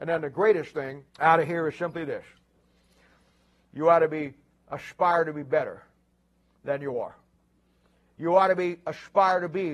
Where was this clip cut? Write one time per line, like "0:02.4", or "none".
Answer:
0:01.1